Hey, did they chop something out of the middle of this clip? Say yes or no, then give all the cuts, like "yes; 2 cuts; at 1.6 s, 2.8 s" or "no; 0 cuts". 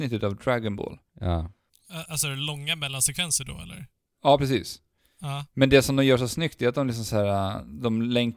no; 0 cuts